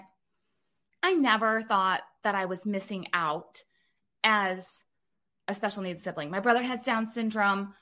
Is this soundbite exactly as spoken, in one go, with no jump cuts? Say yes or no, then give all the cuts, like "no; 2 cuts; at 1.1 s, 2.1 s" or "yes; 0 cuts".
yes; 0 cuts